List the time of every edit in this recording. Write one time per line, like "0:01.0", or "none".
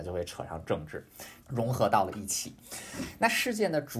0:01.4